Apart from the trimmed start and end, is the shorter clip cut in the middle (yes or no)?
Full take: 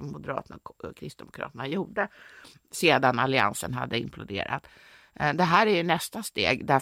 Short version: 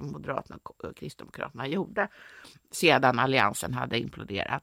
no